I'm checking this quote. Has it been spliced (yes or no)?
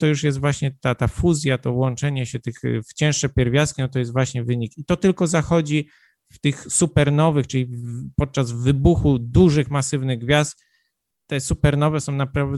no